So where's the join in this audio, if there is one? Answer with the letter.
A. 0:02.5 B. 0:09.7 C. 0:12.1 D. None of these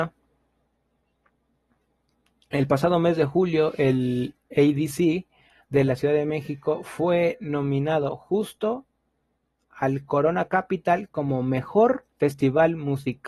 C